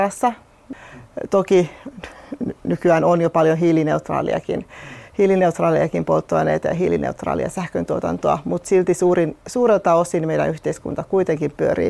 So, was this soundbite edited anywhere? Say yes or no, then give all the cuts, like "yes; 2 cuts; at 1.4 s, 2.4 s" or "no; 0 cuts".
no; 0 cuts